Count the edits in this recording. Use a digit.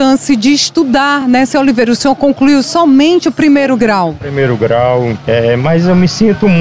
0